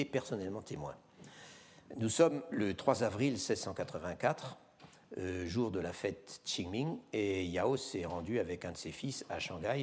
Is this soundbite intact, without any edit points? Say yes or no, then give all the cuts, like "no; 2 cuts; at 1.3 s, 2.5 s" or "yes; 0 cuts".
yes; 0 cuts